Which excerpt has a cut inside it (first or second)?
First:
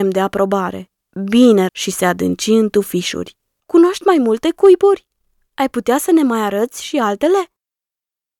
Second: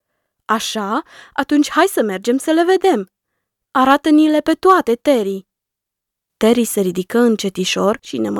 first